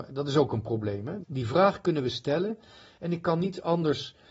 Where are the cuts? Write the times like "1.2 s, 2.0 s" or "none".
1.2 s